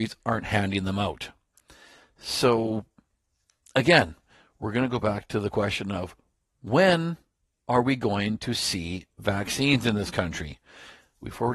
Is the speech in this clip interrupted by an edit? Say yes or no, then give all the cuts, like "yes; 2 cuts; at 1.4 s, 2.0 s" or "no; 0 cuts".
no; 0 cuts